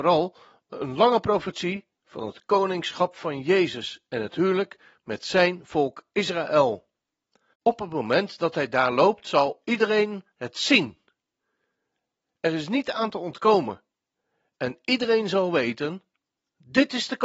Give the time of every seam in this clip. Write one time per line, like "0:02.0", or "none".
0:07.5